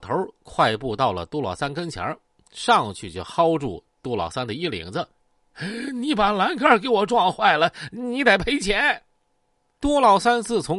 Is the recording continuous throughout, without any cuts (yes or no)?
yes